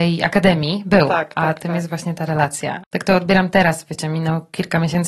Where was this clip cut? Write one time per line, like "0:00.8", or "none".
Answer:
0:02.8